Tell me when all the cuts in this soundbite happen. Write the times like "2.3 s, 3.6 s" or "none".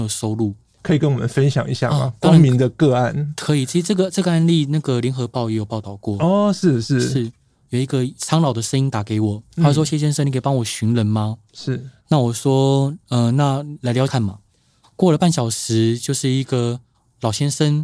14.1 s